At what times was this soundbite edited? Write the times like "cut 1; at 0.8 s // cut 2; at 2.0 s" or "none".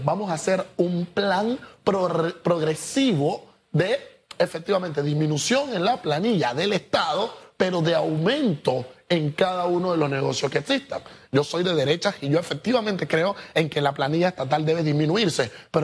cut 1; at 11.3 s